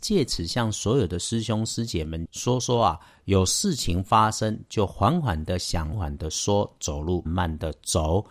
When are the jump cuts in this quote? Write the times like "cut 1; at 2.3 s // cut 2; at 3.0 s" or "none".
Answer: cut 1; at 5.9 s // cut 2; at 7.3 s